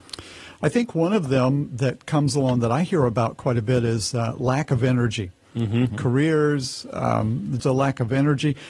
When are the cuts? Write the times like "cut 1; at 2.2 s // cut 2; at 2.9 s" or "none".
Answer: cut 1; at 5.9 s // cut 2; at 7.6 s